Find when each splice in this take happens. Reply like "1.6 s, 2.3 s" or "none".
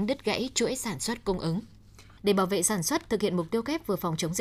2.2 s